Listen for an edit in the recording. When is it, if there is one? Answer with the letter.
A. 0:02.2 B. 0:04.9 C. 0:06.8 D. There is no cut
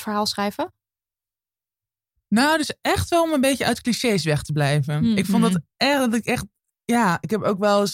D